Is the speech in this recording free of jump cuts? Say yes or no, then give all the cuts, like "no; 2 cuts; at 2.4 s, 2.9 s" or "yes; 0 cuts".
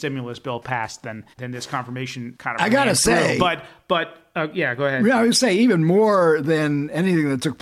no; 1 cut; at 1.3 s